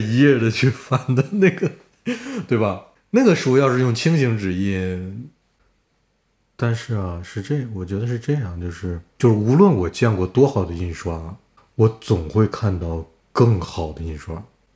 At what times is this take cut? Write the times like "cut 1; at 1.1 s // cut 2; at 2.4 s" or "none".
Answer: none